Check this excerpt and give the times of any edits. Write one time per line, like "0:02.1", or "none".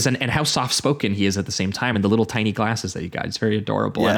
none

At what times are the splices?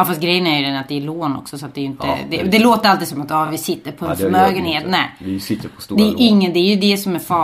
none

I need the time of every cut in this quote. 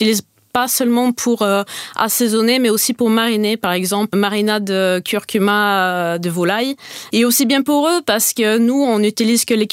0:04.1
0:07.1

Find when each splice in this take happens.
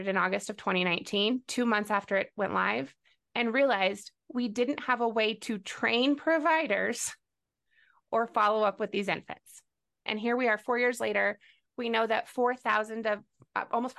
0:10.1

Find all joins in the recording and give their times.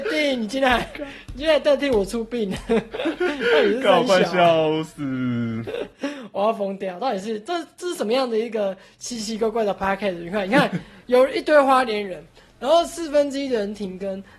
none

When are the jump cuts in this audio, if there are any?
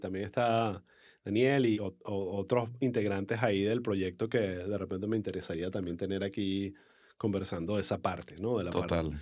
0:01.7

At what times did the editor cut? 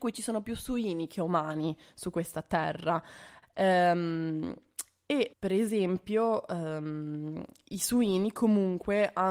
0:03.4
0:05.3

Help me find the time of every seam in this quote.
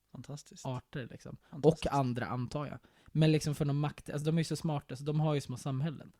none

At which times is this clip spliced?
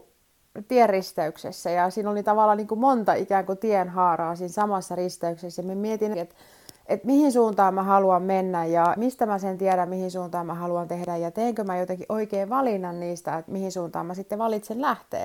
0:06.1
0:09.0
0:13.5

